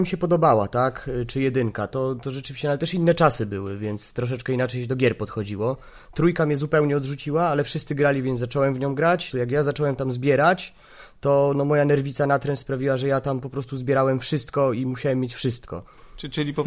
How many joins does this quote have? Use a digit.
1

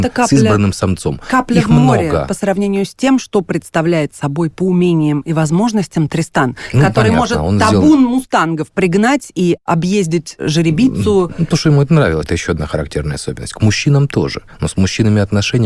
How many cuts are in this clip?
1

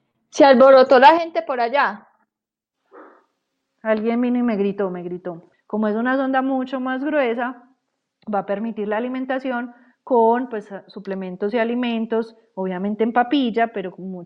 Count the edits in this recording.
1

